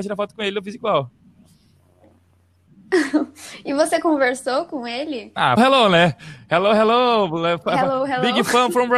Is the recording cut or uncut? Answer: cut